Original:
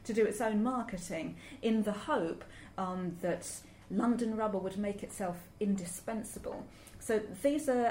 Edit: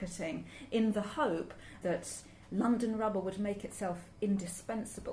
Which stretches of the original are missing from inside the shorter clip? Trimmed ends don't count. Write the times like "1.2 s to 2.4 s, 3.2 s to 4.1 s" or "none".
2.7 s to 3.2 s